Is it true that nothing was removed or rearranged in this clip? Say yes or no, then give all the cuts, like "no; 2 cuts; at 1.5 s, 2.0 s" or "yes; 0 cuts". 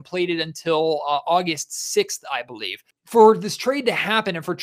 yes; 0 cuts